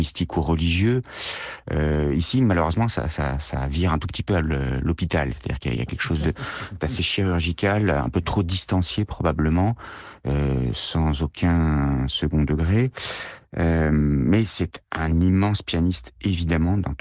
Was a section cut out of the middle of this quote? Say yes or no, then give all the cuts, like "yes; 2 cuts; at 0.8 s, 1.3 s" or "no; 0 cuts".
no; 0 cuts